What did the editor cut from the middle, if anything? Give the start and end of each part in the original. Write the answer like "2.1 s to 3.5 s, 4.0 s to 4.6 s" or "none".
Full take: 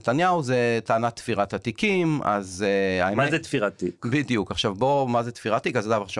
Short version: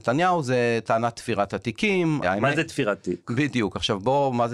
2.2 s to 3.0 s